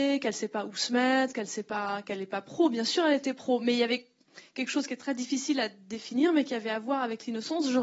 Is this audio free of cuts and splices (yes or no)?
yes